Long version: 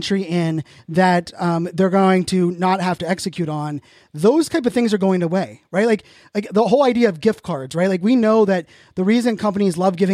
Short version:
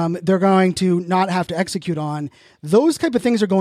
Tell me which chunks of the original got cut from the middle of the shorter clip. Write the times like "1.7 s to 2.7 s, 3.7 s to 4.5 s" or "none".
none